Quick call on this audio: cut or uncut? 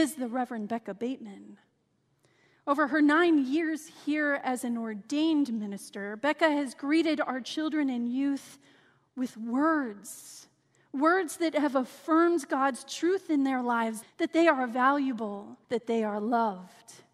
cut